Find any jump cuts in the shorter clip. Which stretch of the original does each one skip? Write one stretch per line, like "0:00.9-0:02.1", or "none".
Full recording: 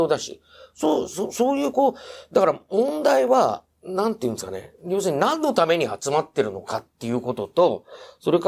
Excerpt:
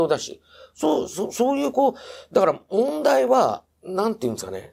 none